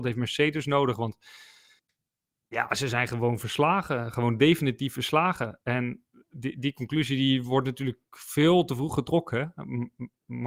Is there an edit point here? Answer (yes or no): no